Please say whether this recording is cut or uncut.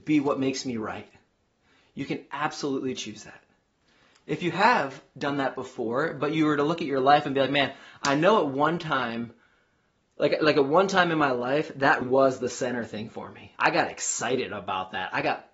cut